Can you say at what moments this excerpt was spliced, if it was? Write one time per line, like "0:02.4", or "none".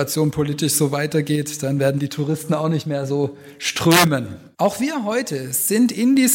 0:04.5

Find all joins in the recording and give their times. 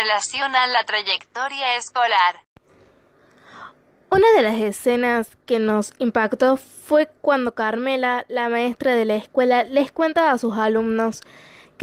none

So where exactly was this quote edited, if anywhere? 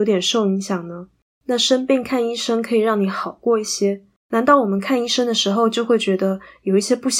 0:01.2
0:04.2

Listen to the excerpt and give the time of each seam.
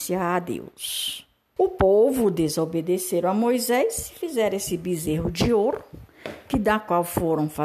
0:01.6

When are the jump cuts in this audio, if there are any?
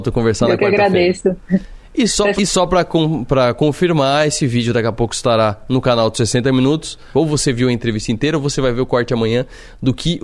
0:02.4
0:07.1

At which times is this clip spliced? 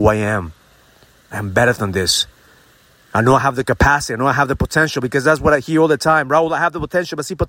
none

